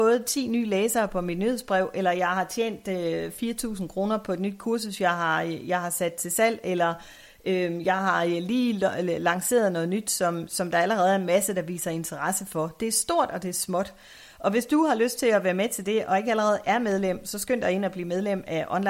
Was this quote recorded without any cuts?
yes; 0 cuts

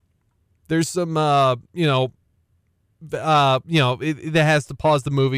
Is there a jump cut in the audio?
no; 0 cuts

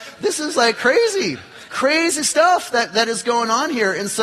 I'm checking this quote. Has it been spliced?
yes; 1 cut; at 1.7 s

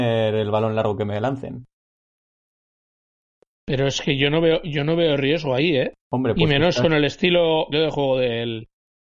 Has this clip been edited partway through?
yes; 2 cuts; at 6.0 s, 7.7 s

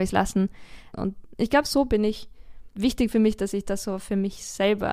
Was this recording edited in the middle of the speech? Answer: yes; 2 cuts; at 0.9 s, 2.8 s

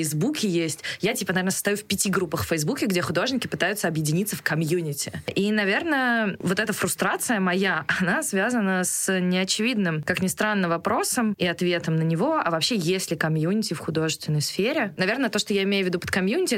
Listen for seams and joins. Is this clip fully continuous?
no; 1 cut; at 15.0 s

